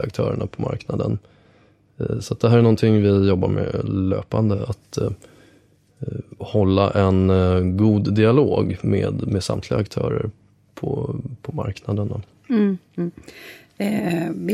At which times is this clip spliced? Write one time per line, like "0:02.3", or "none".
none